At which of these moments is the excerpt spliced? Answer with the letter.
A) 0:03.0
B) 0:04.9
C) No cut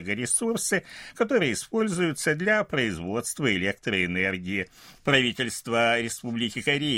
B